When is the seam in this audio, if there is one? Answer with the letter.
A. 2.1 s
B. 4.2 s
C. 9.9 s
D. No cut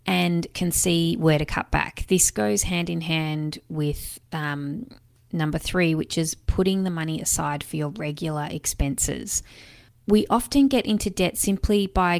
C